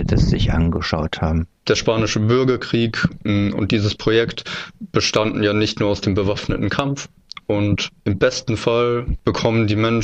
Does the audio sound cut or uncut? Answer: uncut